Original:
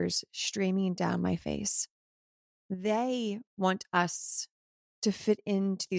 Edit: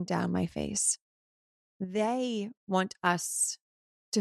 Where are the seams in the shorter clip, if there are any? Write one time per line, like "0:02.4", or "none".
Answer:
none